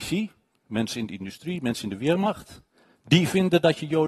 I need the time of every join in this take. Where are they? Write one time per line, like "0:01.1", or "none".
none